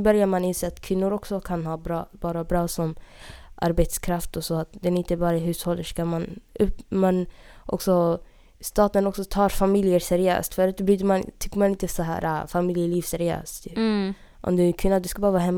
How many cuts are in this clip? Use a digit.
0